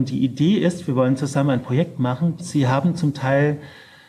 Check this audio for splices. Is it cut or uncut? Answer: cut